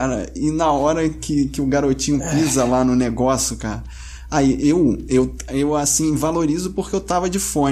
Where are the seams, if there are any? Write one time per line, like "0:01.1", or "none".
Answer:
none